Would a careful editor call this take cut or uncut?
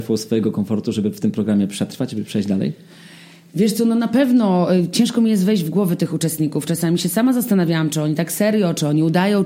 uncut